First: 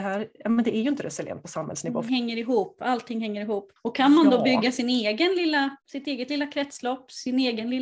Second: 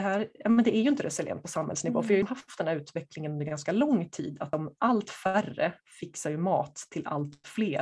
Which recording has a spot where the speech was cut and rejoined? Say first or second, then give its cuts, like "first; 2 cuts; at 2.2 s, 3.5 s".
first; 2 cuts; at 2.1 s, 5.8 s